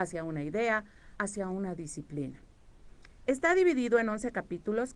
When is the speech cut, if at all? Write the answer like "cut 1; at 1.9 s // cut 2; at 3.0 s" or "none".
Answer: cut 1; at 1.2 s // cut 2; at 3.2 s